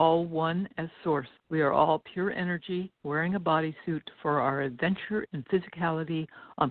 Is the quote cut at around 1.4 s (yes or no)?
yes